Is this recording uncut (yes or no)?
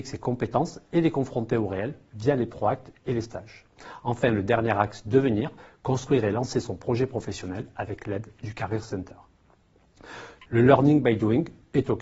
no